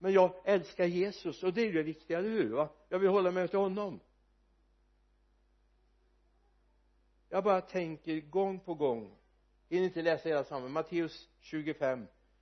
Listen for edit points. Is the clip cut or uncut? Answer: uncut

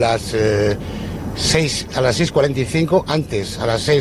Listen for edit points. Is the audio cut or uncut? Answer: uncut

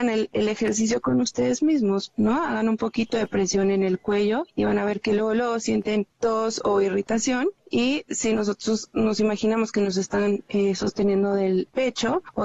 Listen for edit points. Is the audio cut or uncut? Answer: uncut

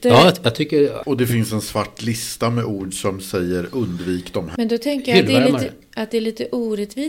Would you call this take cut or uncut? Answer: cut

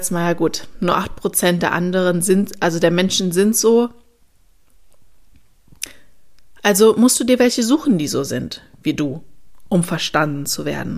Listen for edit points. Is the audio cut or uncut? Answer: uncut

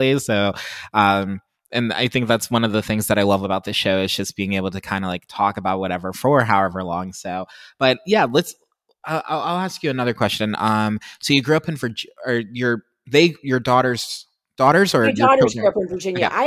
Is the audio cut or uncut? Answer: uncut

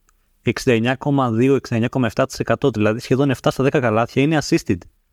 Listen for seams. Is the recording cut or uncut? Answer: uncut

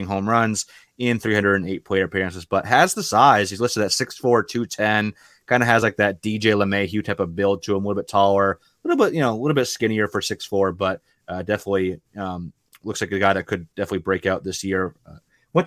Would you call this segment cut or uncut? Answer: uncut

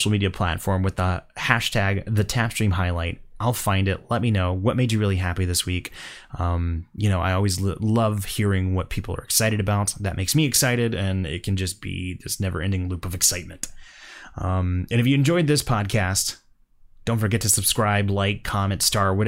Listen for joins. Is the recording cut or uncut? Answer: uncut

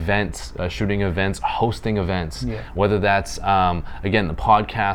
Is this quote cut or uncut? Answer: uncut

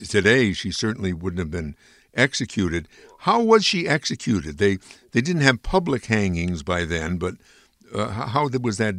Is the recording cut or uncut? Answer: uncut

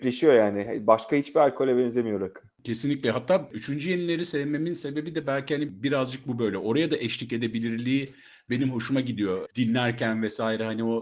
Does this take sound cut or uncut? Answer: uncut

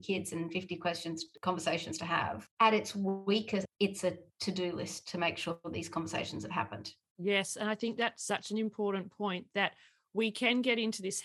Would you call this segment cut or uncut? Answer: cut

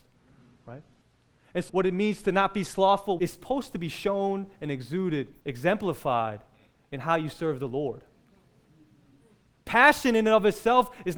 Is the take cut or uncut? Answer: cut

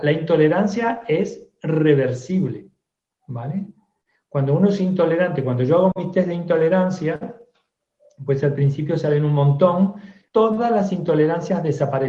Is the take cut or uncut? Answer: cut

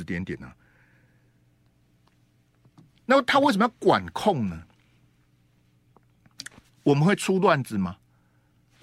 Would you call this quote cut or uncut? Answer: uncut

